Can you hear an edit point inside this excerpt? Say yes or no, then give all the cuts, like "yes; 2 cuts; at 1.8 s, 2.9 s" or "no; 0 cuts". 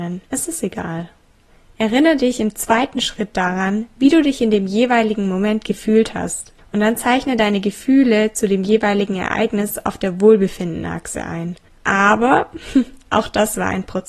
yes; 1 cut; at 11.7 s